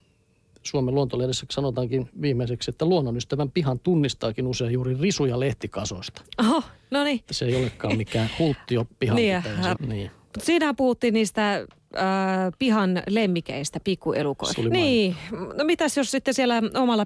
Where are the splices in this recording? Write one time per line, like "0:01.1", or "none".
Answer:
0:09.7
0:14.5